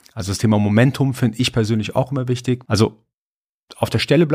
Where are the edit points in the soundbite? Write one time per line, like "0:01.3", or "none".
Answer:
0:02.6